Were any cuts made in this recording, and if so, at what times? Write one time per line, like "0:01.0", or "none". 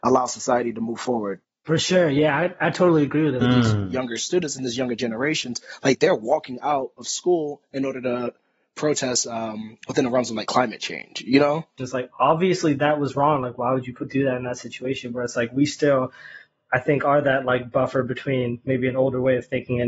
0:03.4
0:11.8